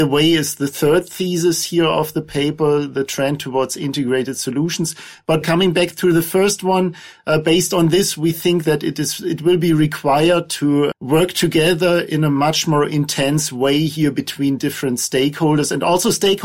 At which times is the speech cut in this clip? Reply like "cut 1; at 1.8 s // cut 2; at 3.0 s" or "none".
cut 1; at 5.4 s // cut 2; at 10.9 s